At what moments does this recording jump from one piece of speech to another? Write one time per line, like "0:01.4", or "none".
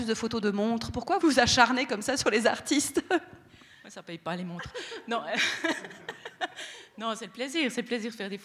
0:01.2